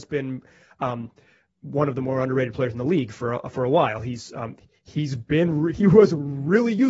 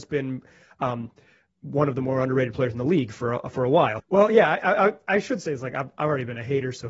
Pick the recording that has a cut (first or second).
second